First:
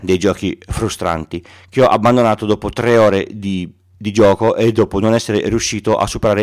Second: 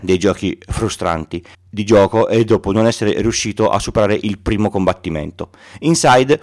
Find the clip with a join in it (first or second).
second